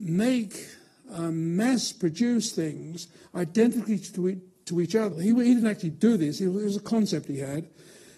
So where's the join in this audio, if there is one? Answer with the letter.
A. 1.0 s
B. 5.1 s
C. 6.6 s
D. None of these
B